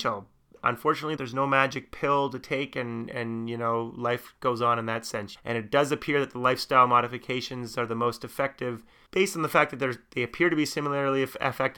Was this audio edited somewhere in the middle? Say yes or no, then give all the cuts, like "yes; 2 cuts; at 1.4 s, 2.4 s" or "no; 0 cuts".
yes; 2 cuts; at 1.2 s, 5.4 s